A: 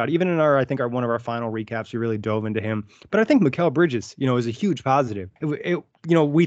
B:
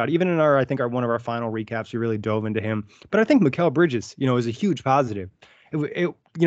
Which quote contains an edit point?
A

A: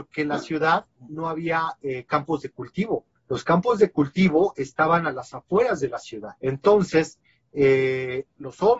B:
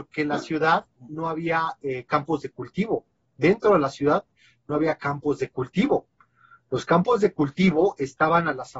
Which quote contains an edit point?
A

